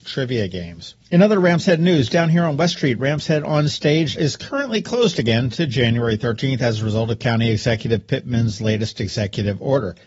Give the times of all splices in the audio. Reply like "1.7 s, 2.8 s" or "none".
4.2 s